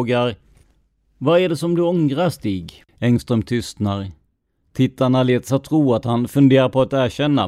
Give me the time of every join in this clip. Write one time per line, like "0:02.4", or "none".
0:02.9